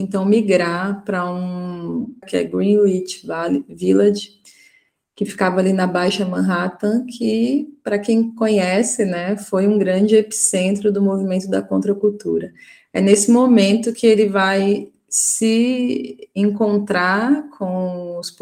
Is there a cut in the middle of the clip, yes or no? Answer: yes